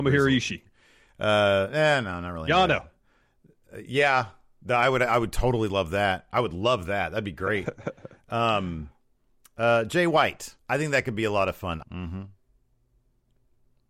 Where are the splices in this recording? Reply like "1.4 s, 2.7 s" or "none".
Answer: 10.6 s, 11.8 s